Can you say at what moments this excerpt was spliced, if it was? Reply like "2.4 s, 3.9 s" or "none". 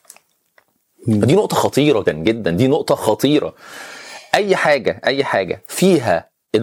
2.1 s